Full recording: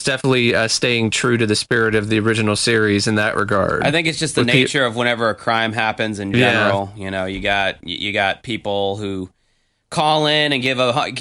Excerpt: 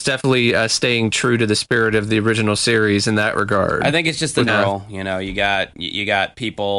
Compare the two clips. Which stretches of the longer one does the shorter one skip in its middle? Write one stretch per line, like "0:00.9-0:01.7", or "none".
0:04.5-0:06.5